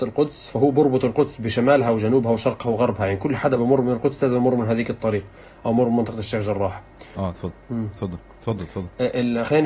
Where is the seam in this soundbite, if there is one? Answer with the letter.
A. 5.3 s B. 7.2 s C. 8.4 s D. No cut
B